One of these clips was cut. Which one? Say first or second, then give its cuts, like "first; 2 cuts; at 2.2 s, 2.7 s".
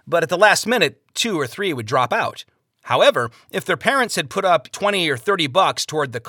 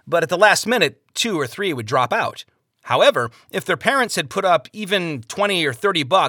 first; 1 cut; at 4.7 s